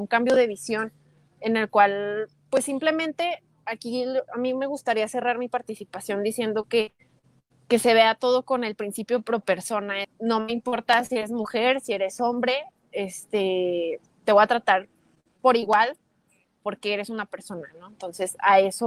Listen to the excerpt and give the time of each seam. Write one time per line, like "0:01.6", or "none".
0:10.0